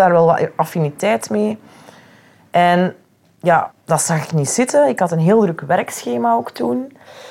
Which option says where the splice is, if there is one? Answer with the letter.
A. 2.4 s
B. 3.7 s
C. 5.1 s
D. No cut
B